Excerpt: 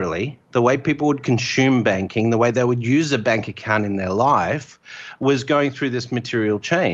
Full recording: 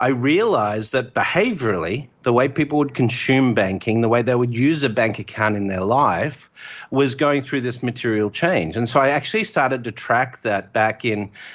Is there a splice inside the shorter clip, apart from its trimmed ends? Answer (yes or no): no